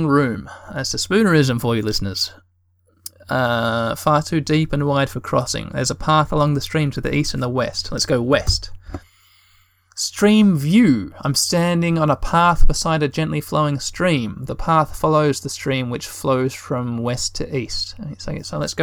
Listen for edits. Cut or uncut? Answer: uncut